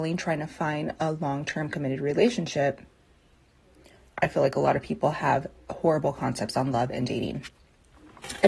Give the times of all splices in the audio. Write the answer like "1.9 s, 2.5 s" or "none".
none